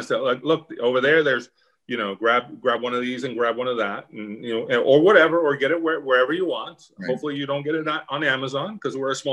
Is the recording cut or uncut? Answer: uncut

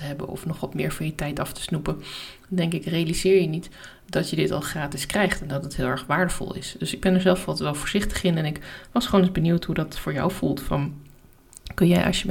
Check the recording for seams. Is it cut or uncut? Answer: uncut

